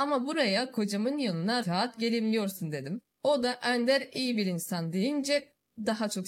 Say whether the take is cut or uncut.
cut